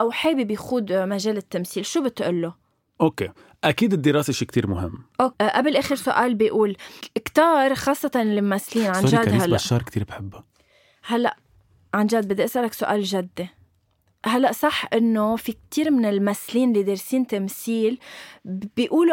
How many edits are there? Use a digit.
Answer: 1